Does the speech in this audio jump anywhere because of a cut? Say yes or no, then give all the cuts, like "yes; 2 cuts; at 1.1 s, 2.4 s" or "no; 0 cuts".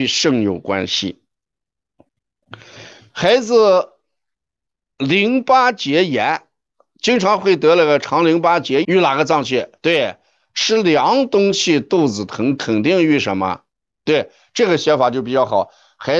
yes; 1 cut; at 8.8 s